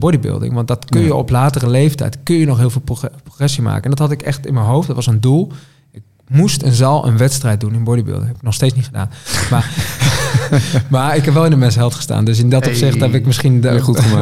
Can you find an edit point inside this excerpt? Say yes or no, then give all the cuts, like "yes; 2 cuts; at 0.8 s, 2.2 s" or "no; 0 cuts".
no; 0 cuts